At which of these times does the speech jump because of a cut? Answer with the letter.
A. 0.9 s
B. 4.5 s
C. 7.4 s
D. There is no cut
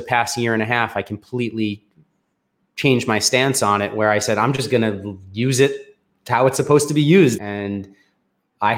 C